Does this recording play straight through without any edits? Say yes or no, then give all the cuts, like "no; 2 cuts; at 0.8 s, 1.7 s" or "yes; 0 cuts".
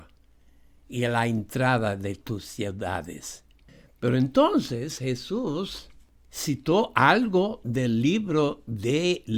yes; 0 cuts